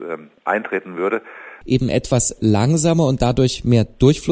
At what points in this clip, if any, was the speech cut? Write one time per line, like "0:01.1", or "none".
0:01.6

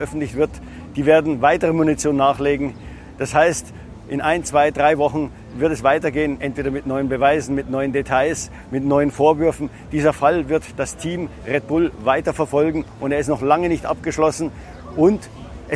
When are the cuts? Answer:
none

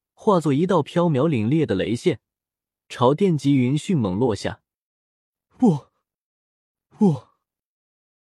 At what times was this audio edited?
none

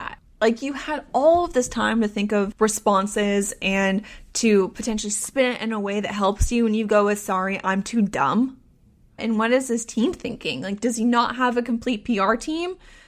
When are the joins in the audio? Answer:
0:09.2

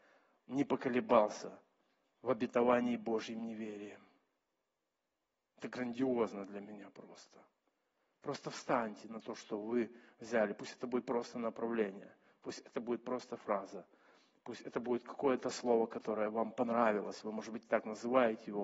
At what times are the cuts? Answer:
none

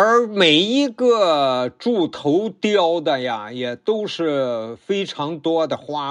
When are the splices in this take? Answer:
none

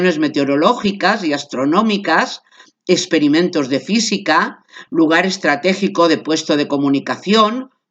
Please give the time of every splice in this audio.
none

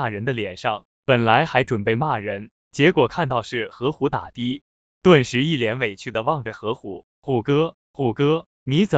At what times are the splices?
0:01.0

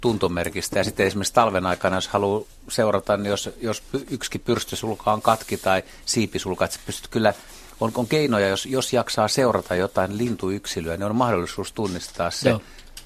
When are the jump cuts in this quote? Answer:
none

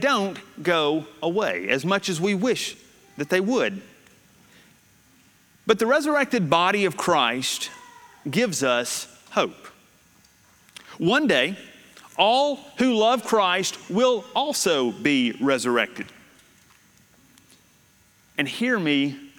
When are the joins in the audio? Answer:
none

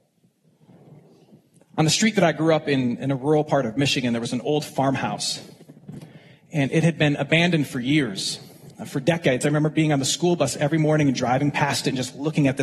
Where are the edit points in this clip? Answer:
none

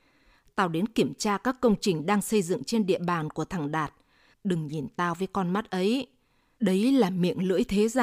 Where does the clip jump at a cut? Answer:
0:04.3

